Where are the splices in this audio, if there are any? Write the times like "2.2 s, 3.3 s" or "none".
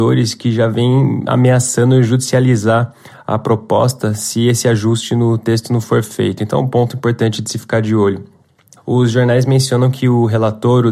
8.8 s